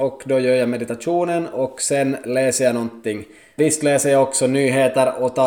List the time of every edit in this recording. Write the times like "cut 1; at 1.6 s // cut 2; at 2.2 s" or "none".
cut 1; at 3.6 s